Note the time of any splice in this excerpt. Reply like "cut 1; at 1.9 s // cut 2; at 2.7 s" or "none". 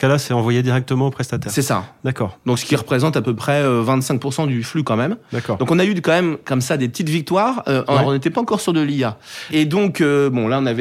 none

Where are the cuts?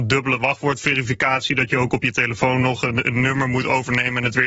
none

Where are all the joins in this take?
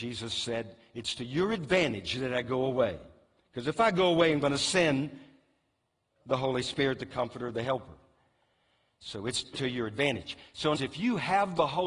cut 1; at 9.5 s // cut 2; at 10.7 s

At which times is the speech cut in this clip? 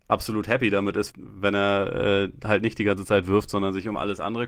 cut 1; at 1.1 s

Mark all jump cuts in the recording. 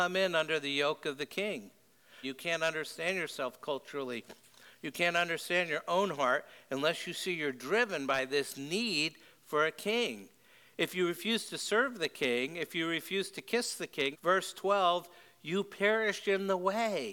cut 1; at 2.2 s // cut 2; at 14.1 s

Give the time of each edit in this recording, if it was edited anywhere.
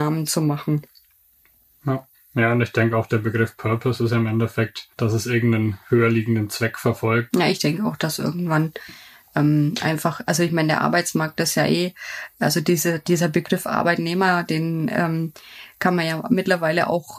cut 1; at 4.9 s // cut 2; at 7.3 s

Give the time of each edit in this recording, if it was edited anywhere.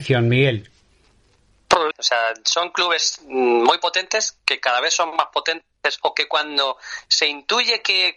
cut 1; at 1.9 s

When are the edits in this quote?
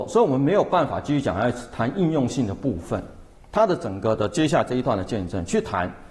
cut 1; at 3.4 s

